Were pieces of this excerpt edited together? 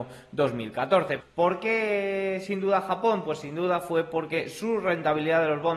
yes; 1 cut; at 1.2 s

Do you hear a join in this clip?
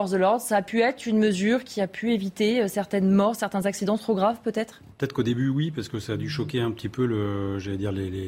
yes; 1 cut; at 4.9 s

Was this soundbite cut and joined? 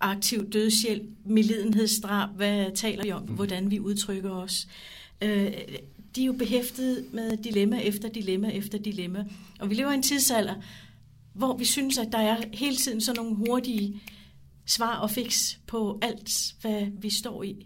yes; 1 cut; at 3.3 s

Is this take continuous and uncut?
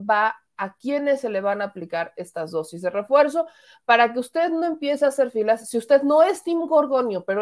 yes; 0 cuts

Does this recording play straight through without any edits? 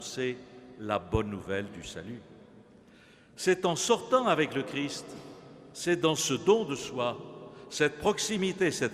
yes; 0 cuts

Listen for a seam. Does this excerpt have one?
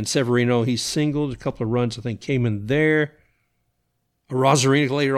no; 0 cuts

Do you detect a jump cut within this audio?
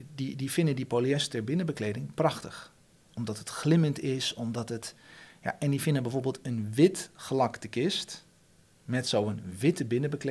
no; 0 cuts

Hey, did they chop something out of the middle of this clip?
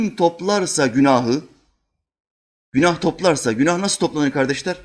no; 0 cuts

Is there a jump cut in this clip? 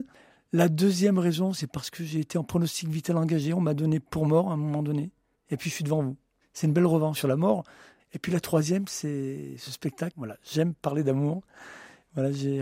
yes; 1 cut; at 10.1 s

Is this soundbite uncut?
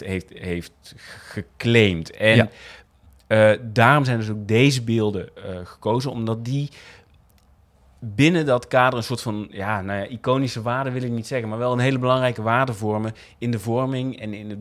yes; 0 cuts

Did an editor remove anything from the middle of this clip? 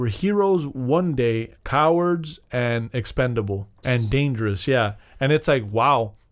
yes; 2 cuts; at 1.6 s, 3.8 s

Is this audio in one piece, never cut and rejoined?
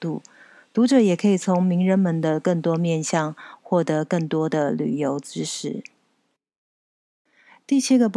yes; 0 cuts

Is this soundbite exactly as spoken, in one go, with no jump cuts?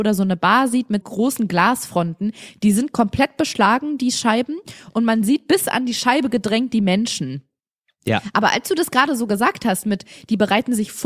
no; 1 cut; at 1.0 s

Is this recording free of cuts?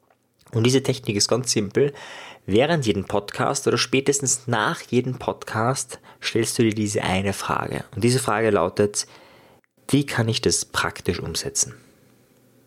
yes; 0 cuts

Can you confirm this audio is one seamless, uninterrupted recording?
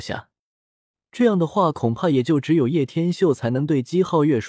no; 1 cut; at 0.9 s

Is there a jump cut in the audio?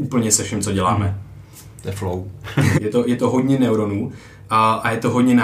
yes; 1 cut; at 2.7 s

